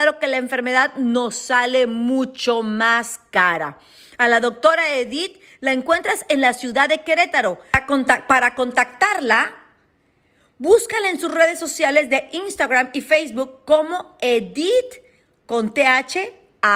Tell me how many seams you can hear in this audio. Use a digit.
0